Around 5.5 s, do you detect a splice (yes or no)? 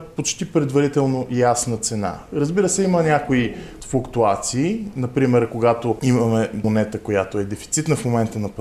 no